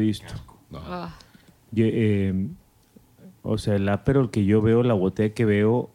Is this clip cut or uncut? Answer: uncut